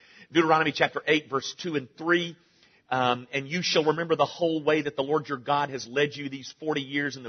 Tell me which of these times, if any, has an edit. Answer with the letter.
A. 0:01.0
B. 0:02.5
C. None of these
C